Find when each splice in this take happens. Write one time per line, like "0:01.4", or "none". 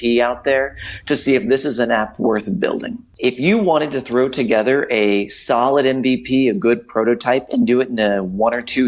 none